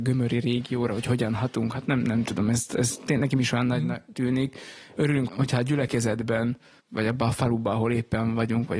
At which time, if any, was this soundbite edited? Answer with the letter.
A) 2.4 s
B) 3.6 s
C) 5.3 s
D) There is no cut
C